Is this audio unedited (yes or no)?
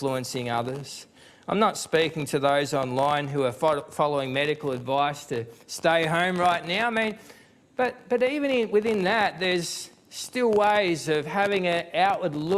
yes